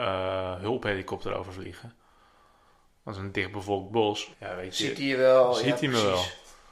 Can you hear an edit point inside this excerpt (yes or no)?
yes